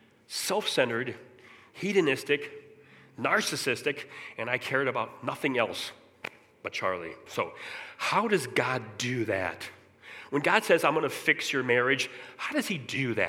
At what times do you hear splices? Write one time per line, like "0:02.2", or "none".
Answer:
0:07.3